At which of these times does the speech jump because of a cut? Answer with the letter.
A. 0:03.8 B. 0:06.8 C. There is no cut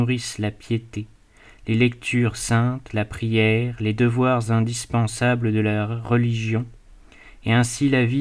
C